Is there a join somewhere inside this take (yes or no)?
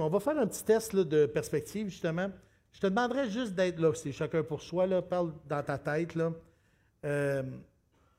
no